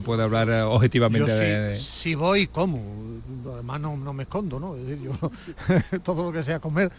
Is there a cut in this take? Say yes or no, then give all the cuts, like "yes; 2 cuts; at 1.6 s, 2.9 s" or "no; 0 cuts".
no; 0 cuts